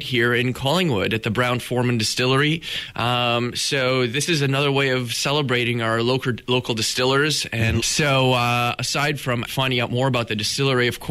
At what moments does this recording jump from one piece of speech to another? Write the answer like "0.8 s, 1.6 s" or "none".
7.8 s, 9.5 s